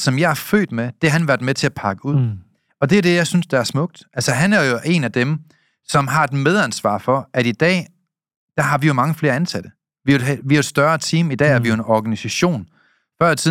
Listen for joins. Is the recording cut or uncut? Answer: uncut